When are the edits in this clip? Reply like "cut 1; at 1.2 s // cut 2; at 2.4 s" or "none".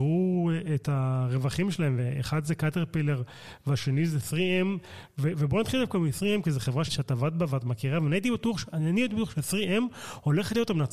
cut 1; at 6.9 s